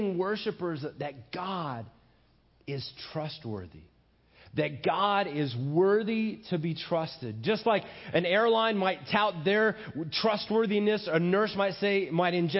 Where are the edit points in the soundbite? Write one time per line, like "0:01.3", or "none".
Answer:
none